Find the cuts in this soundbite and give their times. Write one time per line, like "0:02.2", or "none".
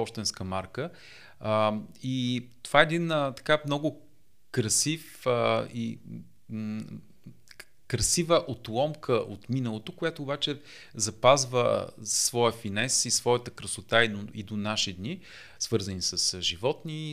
0:15.6